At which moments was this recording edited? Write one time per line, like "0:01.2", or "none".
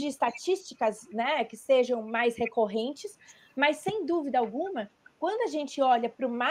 none